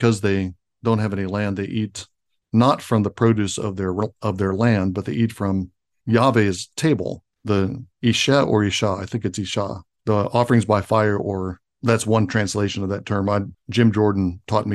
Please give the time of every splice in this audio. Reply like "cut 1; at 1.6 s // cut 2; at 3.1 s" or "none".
cut 1; at 7.3 s // cut 2; at 13.5 s